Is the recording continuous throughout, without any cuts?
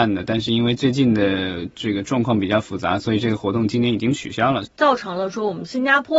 no; 1 cut; at 4.6 s

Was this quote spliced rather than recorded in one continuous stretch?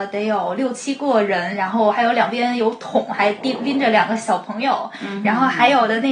no; 0 cuts

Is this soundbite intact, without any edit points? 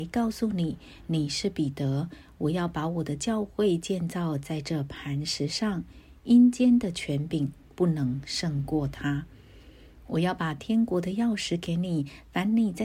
yes; 0 cuts

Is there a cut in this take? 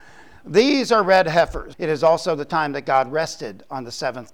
yes; 1 cut; at 1.7 s

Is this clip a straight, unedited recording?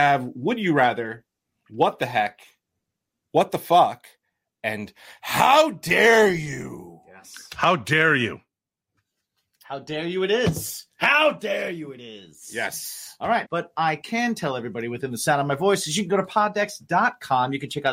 no; 1 cut; at 13.4 s

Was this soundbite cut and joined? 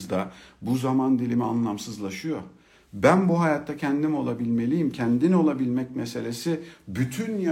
no; 0 cuts

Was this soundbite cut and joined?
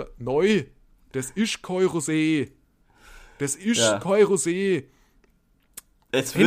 no; 0 cuts

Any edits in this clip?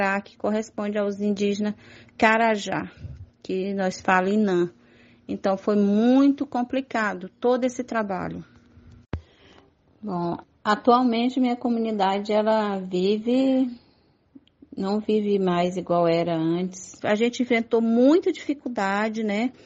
yes; 2 cuts; at 10.4 s, 17.0 s

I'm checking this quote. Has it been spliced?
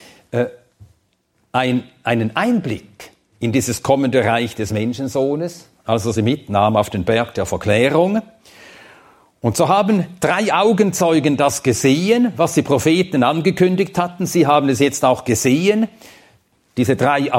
no; 0 cuts

